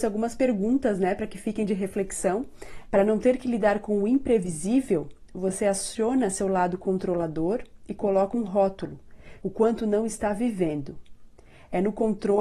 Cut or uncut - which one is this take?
cut